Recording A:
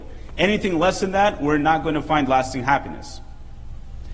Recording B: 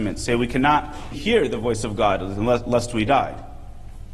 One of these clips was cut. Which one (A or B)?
B